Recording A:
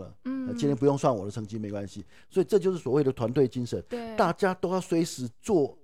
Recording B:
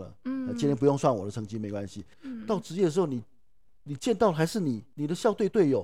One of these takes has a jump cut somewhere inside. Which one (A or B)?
B